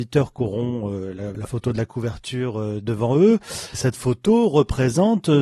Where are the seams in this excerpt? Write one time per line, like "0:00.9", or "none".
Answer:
0:01.3
0:03.7